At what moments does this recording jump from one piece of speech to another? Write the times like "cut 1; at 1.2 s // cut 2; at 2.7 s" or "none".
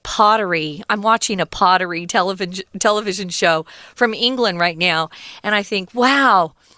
none